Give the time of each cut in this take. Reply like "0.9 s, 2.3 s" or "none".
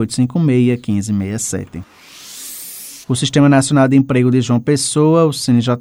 3.0 s